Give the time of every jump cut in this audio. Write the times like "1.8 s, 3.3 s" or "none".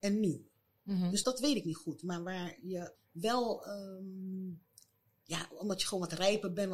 1.2 s, 2.9 s